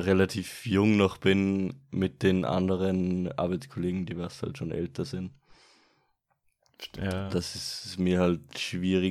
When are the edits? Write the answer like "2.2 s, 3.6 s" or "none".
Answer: none